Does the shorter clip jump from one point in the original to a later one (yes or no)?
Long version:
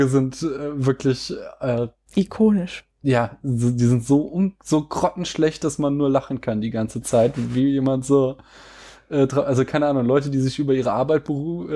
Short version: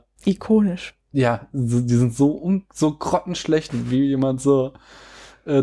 yes